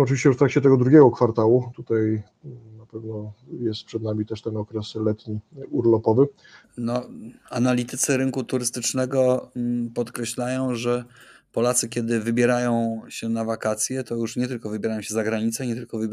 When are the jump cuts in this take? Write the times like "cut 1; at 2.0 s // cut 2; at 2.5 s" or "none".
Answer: cut 1; at 6.6 s